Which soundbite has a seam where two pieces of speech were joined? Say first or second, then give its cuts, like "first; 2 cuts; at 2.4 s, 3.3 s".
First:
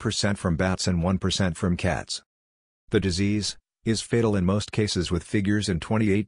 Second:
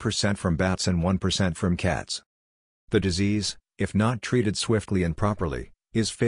first; 1 cut; at 3.7 s